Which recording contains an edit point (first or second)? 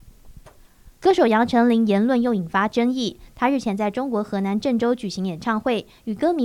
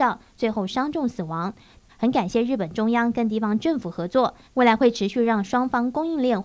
second